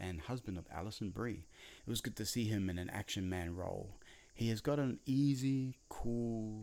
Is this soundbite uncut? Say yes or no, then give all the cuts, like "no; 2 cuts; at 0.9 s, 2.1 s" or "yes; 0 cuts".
no; 1 cut; at 1.8 s